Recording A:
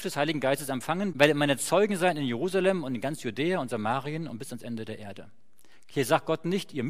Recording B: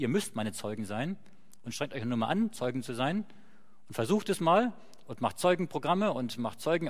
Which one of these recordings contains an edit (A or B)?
A